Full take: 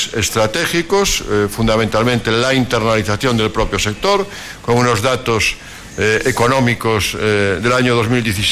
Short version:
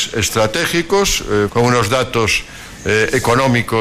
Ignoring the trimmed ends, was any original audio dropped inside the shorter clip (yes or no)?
yes